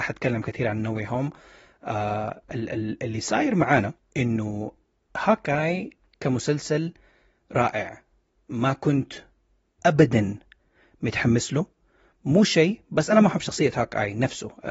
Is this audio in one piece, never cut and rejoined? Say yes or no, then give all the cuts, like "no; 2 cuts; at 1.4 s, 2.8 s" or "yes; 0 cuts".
yes; 0 cuts